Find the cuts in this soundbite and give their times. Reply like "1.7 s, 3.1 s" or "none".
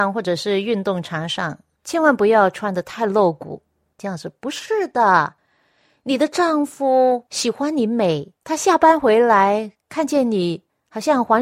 4.0 s, 8.4 s